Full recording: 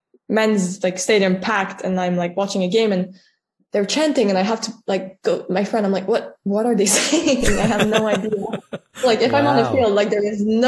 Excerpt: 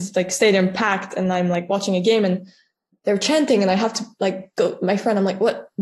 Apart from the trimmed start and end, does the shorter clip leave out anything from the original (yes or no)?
no